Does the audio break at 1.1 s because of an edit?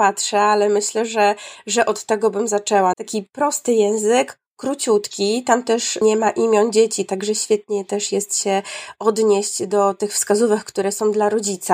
no; 1 cut; at 2.9 s

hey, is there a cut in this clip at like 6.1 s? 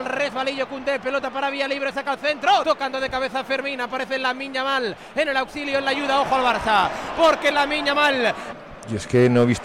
no; 2 cuts; at 2.6 s, 8.5 s

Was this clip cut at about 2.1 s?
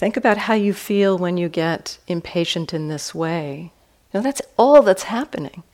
no; 1 cut; at 4.1 s

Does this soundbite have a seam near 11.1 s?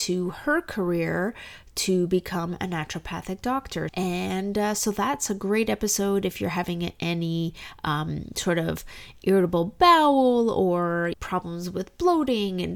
yes; 2 cuts; at 3.9 s, 11.1 s

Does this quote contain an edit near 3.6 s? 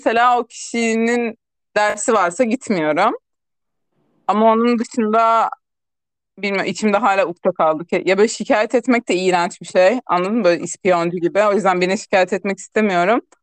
no; 0 cuts

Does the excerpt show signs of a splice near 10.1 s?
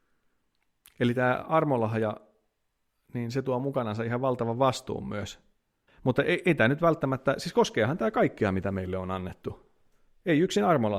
no; 1 cut; at 5.9 s

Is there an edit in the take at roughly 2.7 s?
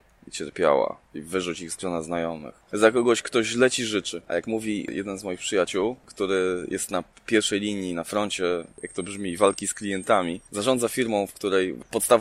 yes; 2 cuts; at 1.0 s, 2.7 s

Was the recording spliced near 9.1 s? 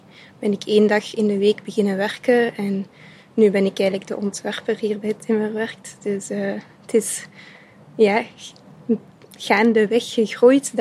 no; 0 cuts

